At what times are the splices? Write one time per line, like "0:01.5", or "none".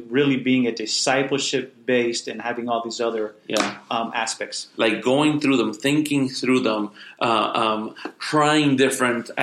0:04.7